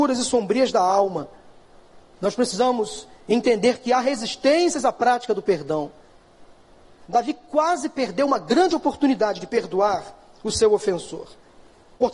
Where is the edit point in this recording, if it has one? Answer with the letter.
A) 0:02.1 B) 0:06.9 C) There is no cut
C